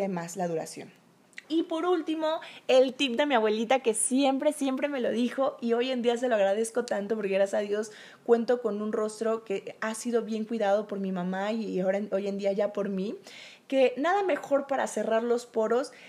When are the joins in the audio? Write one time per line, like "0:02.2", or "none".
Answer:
0:01.4

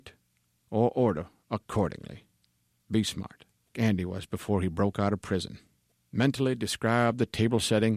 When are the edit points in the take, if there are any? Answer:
0:03.7

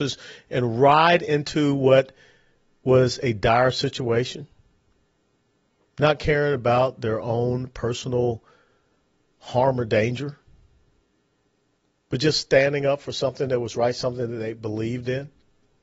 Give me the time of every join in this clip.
none

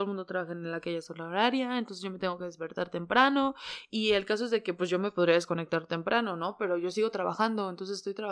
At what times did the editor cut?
none

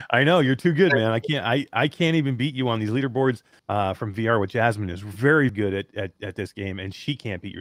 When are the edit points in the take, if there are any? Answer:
0:03.6
0:05.5

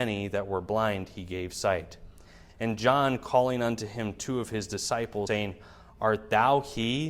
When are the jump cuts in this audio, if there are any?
0:02.5
0:05.3

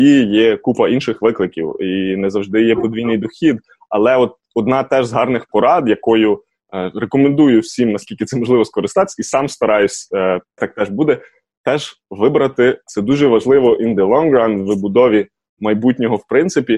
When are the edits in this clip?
0:10.6
0:12.9

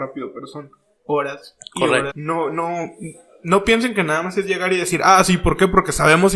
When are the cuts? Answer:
0:02.1

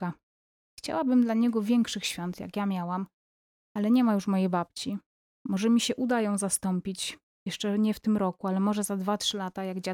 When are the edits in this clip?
none

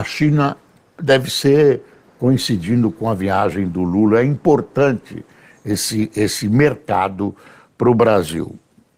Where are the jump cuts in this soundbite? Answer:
none

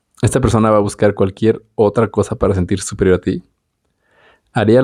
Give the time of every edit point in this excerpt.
none

